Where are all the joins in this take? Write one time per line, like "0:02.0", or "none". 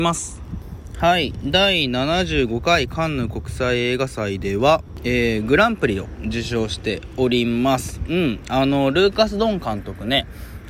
none